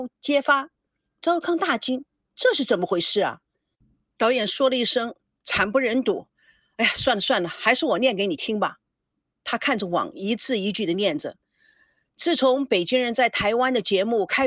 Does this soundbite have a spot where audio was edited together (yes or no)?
no